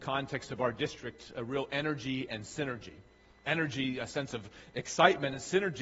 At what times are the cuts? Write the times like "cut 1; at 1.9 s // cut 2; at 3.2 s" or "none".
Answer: none